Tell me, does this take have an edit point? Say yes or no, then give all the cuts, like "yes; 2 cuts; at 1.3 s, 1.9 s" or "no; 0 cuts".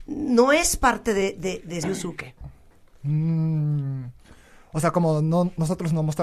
yes; 1 cut; at 1.8 s